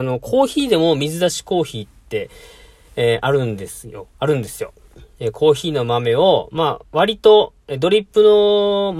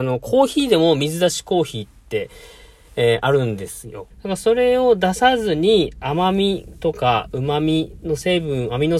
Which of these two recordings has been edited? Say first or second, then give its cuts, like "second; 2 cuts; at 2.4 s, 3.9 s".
second; 1 cut; at 4.1 s